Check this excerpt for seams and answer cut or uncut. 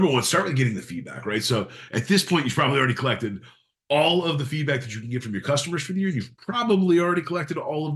uncut